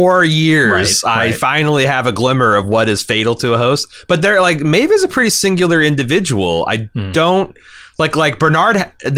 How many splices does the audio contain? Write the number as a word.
zero